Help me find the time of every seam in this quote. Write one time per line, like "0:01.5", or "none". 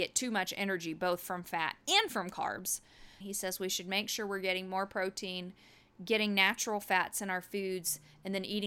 0:03.2